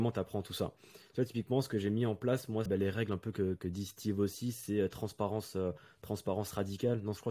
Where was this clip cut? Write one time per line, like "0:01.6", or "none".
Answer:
0:02.7